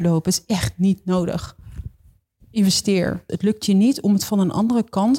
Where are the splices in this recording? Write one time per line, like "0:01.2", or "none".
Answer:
0:03.3